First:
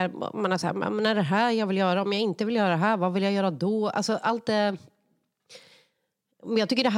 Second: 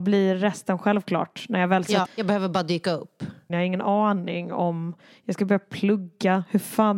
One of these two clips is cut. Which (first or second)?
second